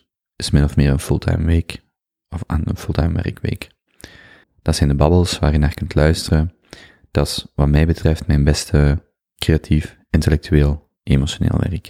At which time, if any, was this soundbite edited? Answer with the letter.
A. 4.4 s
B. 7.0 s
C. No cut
A